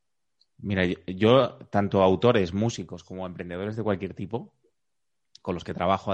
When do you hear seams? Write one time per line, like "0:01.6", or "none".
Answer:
none